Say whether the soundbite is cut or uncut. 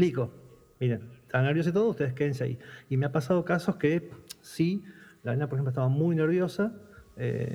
uncut